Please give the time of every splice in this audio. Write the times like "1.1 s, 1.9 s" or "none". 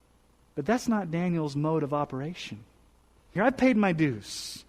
3.4 s